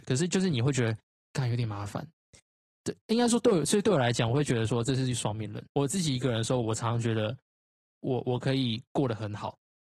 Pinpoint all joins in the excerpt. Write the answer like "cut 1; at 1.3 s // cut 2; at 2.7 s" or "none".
cut 1; at 2.7 s // cut 2; at 5.7 s